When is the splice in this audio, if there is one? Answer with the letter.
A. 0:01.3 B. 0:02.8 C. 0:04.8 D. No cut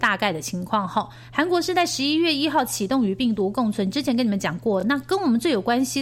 D